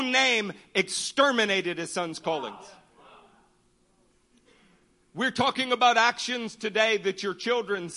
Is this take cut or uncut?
uncut